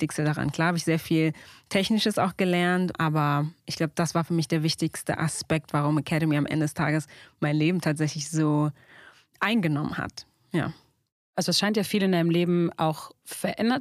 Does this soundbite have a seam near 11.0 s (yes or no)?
no